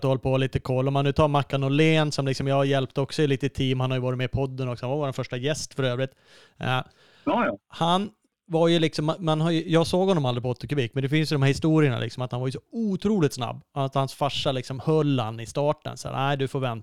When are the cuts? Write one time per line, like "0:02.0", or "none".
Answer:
none